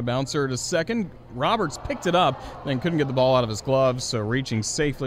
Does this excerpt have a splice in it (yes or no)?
no